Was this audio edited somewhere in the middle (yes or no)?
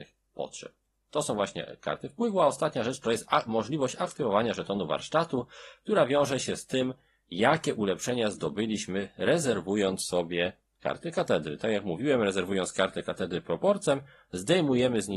no